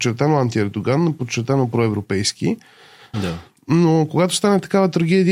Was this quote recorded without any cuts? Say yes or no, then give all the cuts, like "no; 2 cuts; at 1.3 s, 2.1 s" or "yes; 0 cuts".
no; 1 cut; at 3.1 s